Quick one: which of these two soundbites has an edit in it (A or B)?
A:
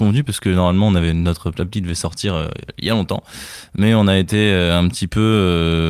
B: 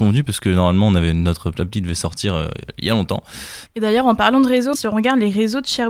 B